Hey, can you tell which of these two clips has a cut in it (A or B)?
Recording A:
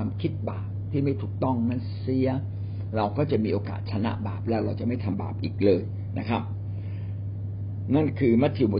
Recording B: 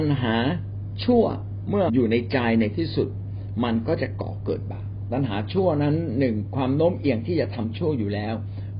B